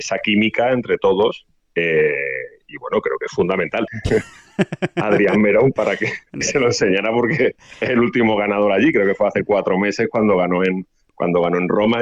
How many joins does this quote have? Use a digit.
2